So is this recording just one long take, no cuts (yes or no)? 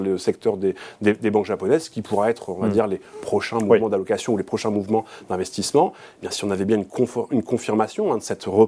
yes